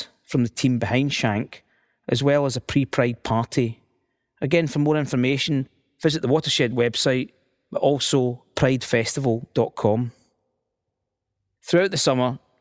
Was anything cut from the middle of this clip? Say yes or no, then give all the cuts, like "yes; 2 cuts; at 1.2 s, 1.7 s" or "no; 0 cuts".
no; 0 cuts